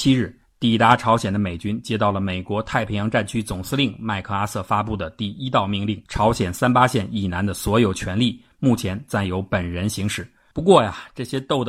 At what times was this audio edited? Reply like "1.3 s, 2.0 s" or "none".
6.1 s, 10.5 s